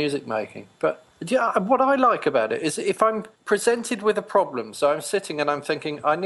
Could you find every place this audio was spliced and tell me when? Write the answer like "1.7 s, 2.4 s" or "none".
1.1 s, 3.3 s